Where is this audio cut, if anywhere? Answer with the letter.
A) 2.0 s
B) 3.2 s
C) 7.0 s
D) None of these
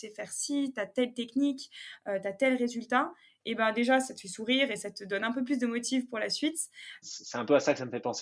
C